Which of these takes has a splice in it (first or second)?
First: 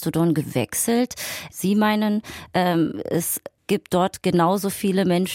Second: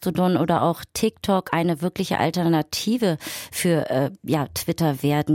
first